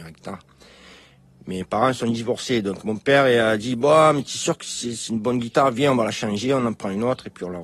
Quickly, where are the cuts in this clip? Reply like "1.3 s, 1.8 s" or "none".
none